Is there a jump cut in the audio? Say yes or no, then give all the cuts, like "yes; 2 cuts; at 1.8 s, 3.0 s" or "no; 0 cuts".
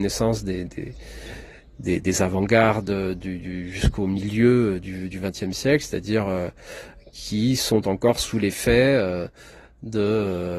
no; 0 cuts